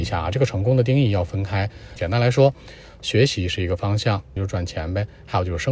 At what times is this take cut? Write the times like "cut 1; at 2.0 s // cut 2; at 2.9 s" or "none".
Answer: cut 1; at 2.0 s // cut 2; at 4.4 s